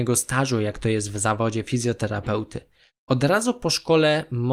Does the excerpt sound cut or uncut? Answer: uncut